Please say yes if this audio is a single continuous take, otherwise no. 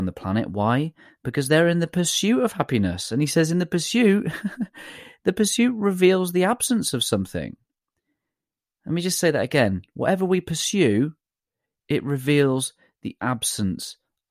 yes